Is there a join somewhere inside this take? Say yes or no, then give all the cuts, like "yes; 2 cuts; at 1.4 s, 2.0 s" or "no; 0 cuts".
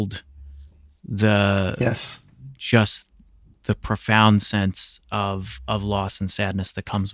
no; 0 cuts